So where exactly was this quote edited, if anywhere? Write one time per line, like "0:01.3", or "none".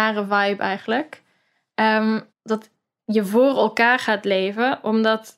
0:02.3